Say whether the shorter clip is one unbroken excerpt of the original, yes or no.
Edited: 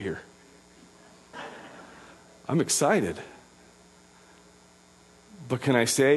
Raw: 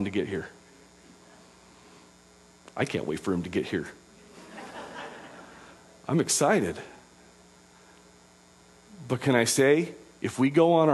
no